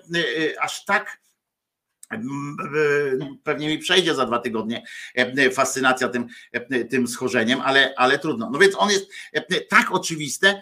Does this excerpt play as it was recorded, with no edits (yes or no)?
no